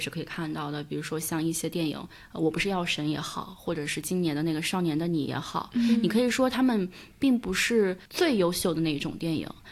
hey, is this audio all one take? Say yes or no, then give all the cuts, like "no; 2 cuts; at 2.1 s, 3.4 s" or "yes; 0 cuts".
no; 1 cut; at 8.1 s